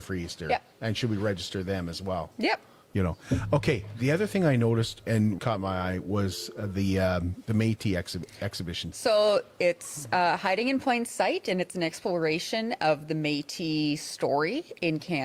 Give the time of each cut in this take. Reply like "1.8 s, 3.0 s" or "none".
5.4 s, 8.9 s